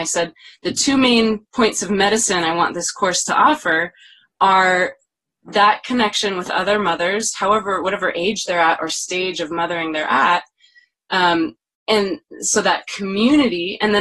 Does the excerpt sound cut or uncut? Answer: uncut